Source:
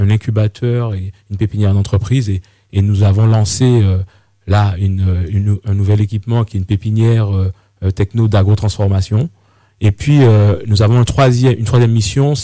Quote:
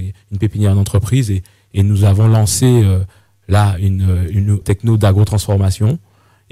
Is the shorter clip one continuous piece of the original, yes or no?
no